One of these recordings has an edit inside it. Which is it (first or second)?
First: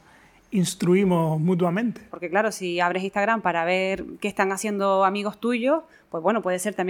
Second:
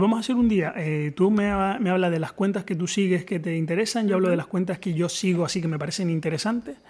first